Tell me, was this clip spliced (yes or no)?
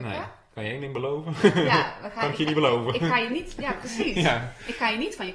no